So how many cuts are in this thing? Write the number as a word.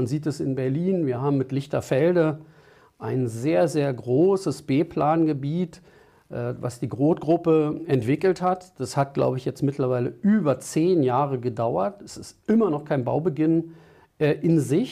zero